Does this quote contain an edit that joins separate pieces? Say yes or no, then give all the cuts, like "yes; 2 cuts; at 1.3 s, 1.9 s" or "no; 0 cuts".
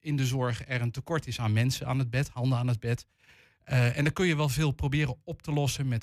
no; 0 cuts